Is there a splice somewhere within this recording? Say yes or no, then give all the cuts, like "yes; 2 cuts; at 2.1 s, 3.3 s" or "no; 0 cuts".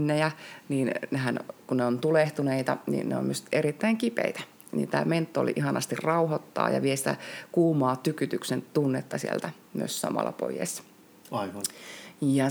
no; 0 cuts